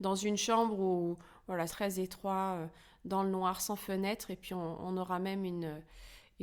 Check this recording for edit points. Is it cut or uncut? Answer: cut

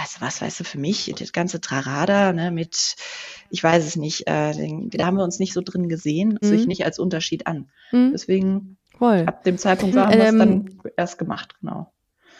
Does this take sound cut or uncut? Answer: cut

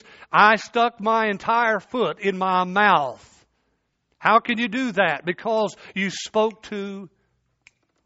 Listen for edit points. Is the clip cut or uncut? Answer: uncut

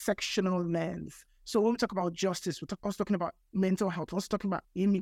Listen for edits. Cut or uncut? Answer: uncut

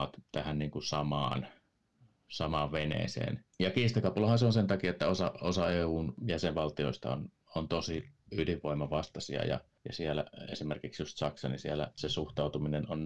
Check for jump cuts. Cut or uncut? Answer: cut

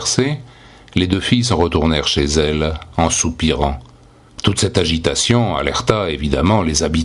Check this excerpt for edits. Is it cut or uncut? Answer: cut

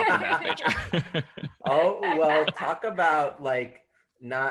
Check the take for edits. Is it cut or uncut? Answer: uncut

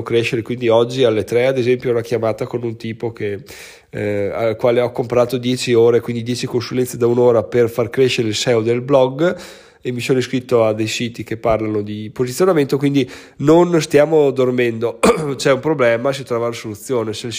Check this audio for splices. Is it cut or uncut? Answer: uncut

